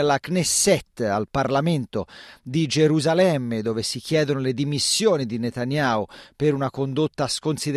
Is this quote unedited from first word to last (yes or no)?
yes